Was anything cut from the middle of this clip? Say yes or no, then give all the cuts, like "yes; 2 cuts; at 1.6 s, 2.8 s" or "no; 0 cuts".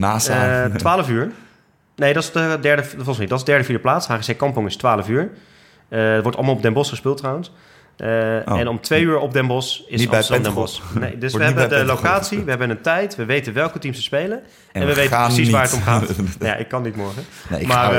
no; 0 cuts